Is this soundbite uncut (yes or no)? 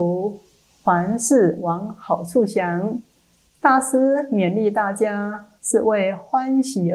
no